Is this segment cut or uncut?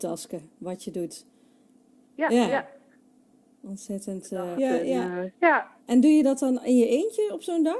cut